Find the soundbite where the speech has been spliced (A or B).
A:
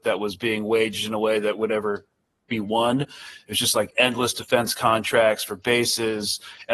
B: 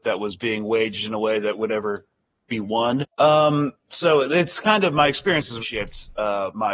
B